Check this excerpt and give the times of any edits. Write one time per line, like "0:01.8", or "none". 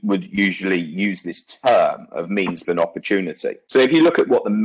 0:02.6